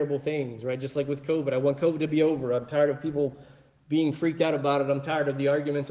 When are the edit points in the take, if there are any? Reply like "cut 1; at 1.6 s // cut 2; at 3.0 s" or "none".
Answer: none